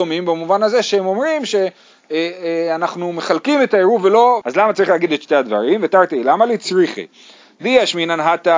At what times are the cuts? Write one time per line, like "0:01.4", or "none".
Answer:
0:04.4